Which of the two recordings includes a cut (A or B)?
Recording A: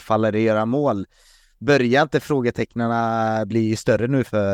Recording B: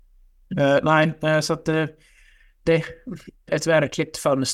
B